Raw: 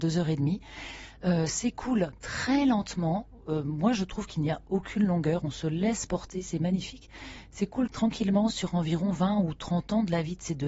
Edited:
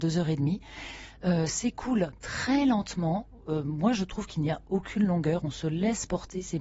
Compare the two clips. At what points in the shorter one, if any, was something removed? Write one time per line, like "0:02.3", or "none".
none